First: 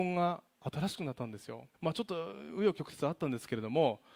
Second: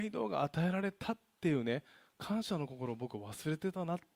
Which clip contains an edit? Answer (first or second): first